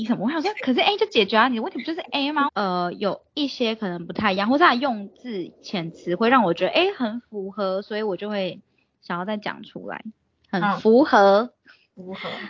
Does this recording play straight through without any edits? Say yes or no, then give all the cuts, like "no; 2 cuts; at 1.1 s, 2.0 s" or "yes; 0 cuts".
no; 1 cut; at 2.5 s